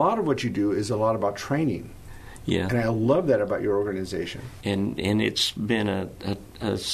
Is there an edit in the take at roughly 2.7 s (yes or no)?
no